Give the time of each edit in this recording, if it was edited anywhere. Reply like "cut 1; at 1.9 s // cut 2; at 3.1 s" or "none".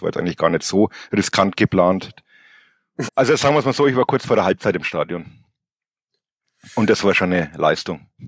cut 1; at 3.1 s